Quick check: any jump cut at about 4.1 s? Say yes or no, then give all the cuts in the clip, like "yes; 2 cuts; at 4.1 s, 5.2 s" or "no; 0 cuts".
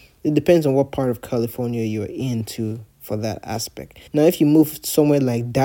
yes; 1 cut; at 4.1 s